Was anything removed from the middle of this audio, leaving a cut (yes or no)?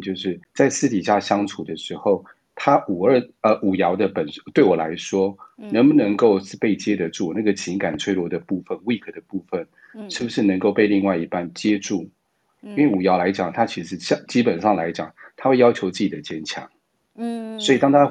yes